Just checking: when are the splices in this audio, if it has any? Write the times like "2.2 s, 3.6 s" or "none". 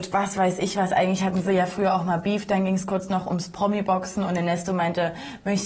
none